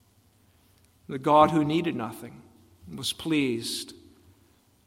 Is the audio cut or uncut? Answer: uncut